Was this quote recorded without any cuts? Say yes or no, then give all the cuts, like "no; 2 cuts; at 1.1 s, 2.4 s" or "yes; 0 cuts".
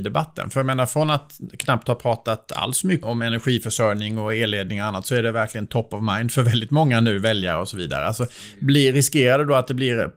no; 1 cut; at 3.0 s